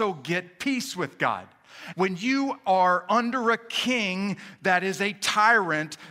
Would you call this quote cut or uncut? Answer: cut